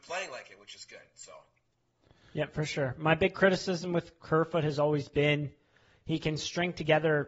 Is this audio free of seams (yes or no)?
yes